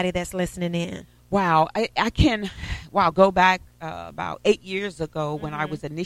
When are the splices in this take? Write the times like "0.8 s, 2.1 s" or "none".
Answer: none